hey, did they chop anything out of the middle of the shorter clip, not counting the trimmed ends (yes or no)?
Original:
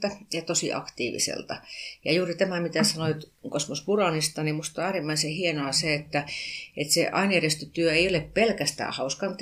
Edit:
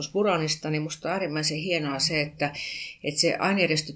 no